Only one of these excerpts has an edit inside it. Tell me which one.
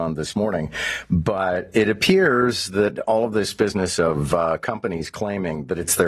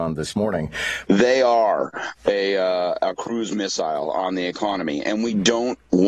second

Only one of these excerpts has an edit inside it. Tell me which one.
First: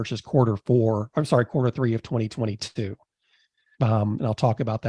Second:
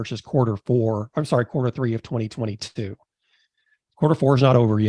first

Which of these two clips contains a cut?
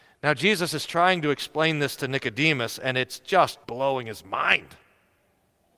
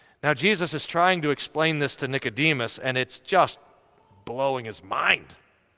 first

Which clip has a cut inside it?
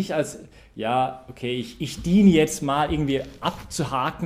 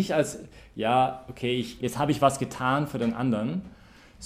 second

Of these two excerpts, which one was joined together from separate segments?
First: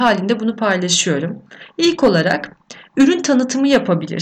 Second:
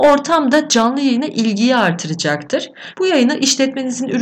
second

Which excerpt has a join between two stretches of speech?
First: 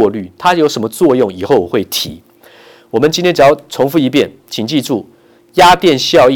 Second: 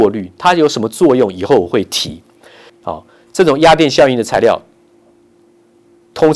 second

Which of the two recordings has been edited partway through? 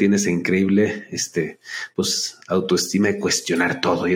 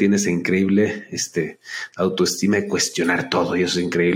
second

